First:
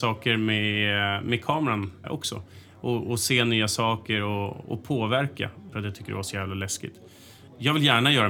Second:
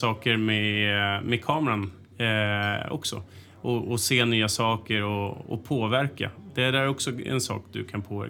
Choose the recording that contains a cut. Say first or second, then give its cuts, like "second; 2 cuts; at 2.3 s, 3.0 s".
first; 2 cuts; at 2.0 s, 5.7 s